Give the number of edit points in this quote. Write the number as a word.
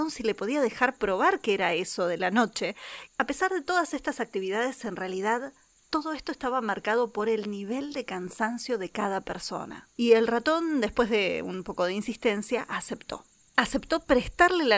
two